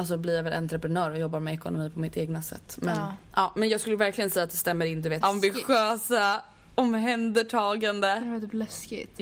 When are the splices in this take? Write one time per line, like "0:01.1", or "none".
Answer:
0:05.2